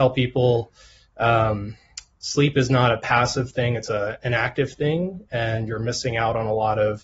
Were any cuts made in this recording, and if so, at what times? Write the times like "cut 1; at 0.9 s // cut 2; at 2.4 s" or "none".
none